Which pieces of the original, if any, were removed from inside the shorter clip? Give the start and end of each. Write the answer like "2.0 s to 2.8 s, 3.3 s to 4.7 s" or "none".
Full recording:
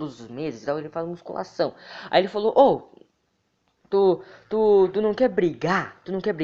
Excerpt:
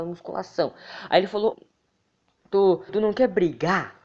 2.5 s to 2.9 s, 4.3 s to 4.9 s